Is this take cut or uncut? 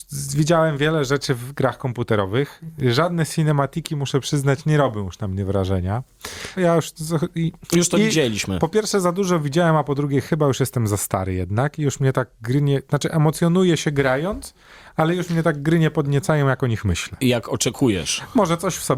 cut